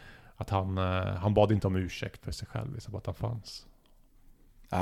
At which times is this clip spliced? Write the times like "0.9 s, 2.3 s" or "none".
2.2 s